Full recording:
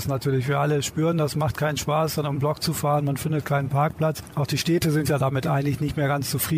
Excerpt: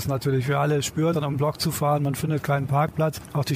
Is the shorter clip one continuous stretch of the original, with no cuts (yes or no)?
no